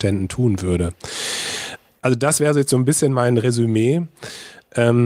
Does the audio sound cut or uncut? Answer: uncut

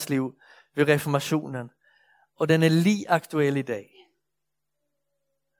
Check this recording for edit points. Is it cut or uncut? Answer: uncut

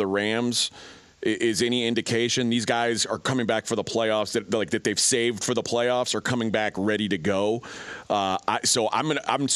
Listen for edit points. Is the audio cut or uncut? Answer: uncut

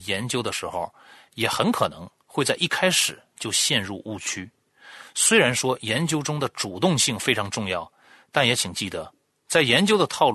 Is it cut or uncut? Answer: uncut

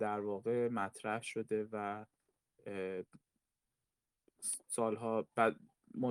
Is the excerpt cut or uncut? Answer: uncut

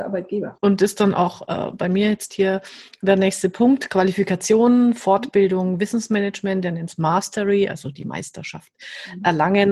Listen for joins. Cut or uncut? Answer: uncut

